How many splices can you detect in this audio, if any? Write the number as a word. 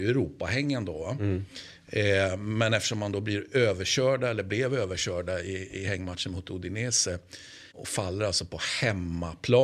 one